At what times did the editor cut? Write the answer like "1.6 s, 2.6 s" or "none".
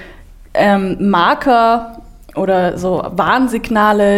none